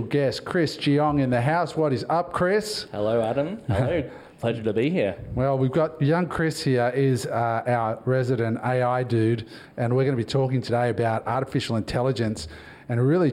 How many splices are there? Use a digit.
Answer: 0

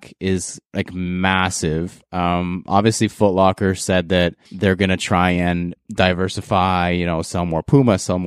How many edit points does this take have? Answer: 1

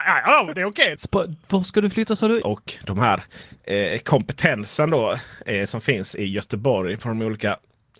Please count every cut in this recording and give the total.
2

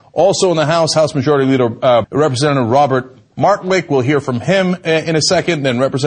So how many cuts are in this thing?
1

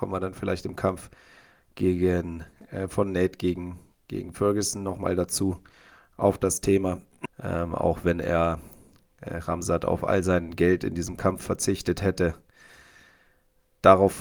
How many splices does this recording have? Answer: 1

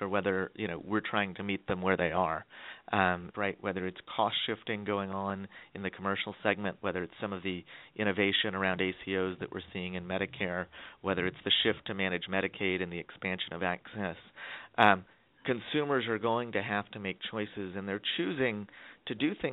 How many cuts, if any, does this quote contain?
1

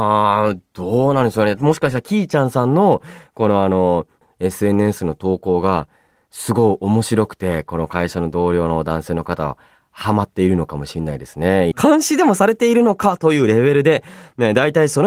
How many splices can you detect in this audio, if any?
2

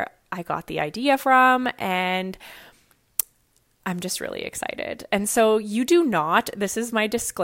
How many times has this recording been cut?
0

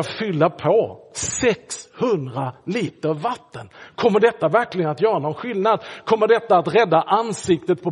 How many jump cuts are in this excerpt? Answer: 0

